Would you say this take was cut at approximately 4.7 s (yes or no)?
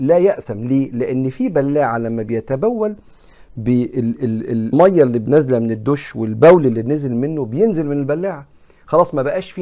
yes